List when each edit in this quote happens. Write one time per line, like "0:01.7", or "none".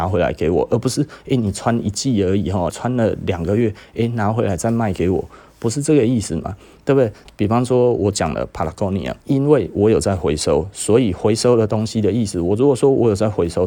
0:02.7
0:07.3
0:09.2